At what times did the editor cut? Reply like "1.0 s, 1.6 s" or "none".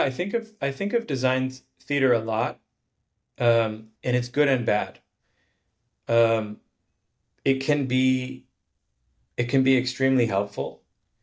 4.0 s